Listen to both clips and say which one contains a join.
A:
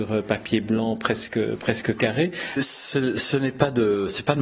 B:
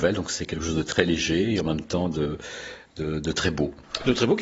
A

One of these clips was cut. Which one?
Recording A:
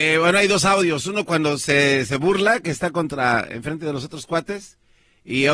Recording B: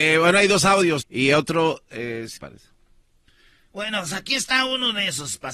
B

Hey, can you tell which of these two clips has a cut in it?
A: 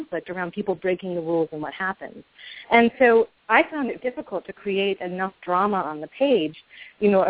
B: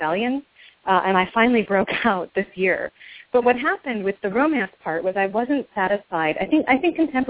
A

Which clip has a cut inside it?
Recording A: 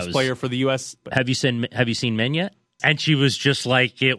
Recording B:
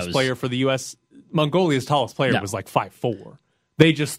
A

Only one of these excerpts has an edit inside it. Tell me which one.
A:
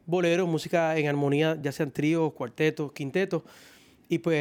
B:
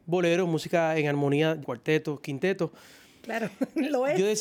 B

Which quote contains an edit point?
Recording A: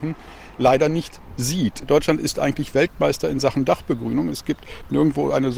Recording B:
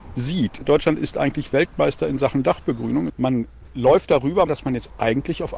B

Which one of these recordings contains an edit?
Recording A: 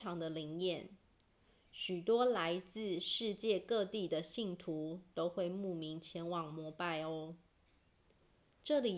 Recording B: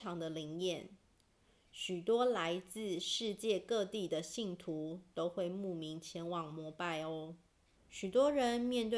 B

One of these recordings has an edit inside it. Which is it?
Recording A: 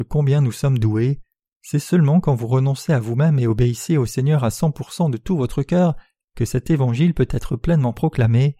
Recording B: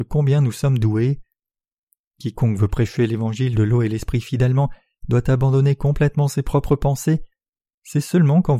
A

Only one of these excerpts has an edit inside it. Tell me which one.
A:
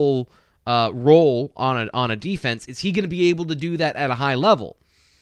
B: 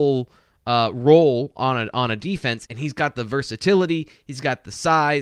B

